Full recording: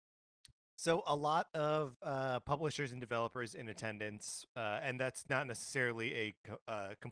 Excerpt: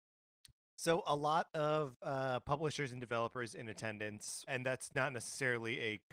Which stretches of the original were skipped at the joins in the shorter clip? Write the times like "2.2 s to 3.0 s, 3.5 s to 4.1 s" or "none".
4.5 s to 4.8 s